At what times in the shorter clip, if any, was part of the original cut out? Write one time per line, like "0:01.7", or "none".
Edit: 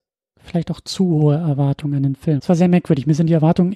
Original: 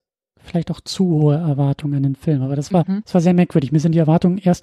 0:02.4